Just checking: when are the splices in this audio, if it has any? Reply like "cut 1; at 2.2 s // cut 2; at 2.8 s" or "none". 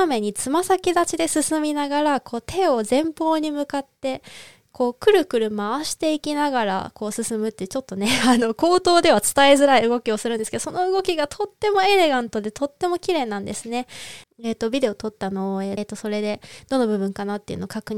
cut 1; at 14.2 s // cut 2; at 15.8 s

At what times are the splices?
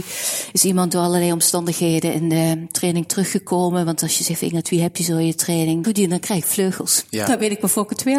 cut 1; at 5.8 s

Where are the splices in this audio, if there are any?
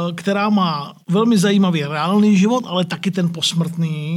cut 1; at 1.0 s

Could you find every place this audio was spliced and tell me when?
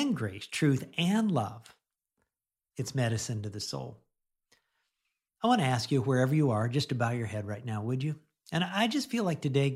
none

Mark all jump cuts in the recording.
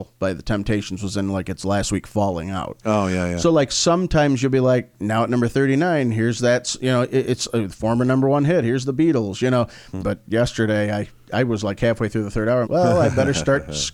cut 1; at 10.0 s // cut 2; at 12.6 s

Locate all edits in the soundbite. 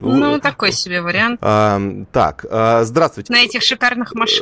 cut 1; at 1.4 s // cut 2; at 3.3 s

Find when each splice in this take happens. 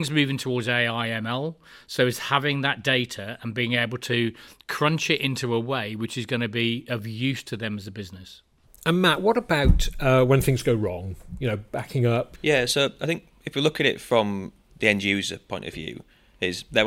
cut 1; at 12.3 s // cut 2; at 14.7 s

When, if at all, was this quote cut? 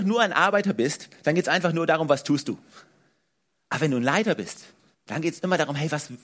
cut 1; at 4.9 s

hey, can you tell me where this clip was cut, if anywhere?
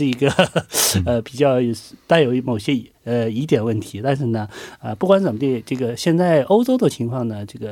cut 1; at 2.4 s

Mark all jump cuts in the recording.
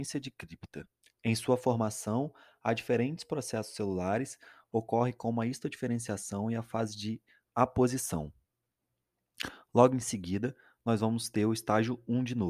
cut 1; at 1.0 s

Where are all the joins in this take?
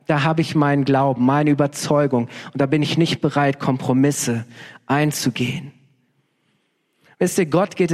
none

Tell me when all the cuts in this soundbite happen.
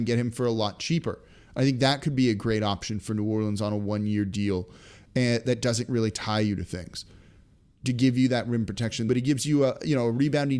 cut 1; at 9.1 s

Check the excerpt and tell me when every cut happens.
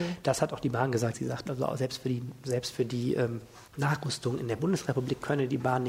cut 1; at 1.1 s // cut 2; at 3.7 s

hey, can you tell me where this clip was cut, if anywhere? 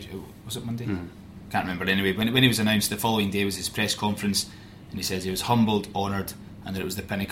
none

